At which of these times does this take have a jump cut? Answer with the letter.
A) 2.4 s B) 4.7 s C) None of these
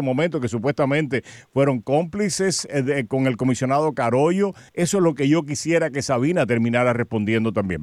B